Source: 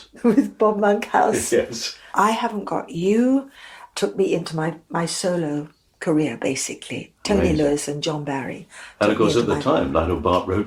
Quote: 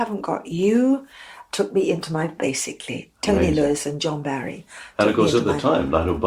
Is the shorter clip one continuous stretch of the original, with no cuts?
no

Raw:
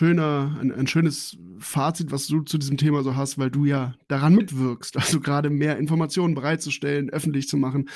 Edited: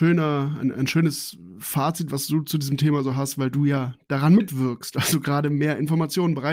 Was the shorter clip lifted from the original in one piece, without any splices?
yes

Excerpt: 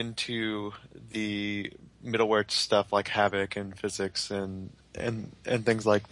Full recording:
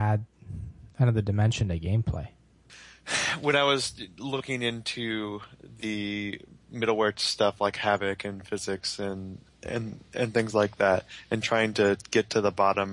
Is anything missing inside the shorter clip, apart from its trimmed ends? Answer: no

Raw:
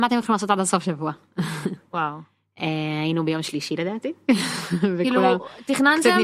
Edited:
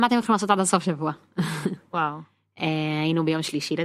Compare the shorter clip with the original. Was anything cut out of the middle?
no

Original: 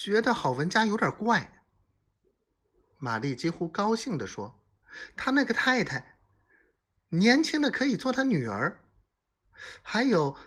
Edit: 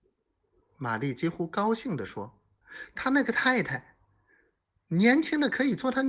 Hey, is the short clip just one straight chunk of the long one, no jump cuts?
yes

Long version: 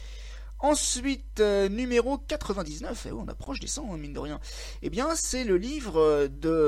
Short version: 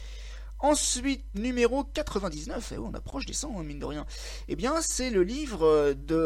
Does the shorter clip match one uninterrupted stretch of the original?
no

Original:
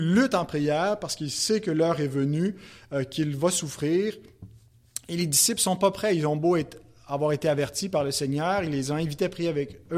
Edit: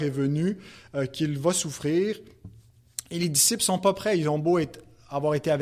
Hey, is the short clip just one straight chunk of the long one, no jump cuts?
yes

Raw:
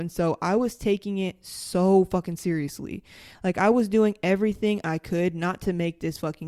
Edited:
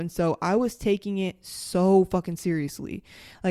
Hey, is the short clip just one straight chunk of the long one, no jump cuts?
yes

